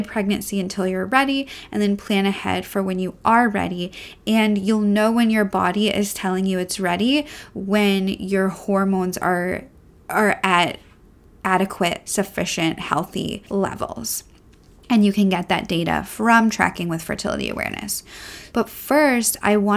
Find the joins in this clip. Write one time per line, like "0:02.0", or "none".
0:18.5